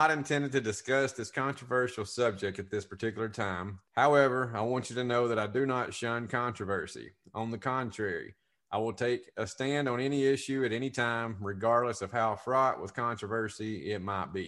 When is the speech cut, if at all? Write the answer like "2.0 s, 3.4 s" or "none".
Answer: 3.9 s